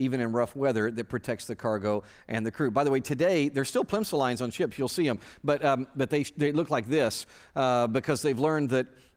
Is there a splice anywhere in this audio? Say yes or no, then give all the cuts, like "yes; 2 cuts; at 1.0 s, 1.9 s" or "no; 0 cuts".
no; 0 cuts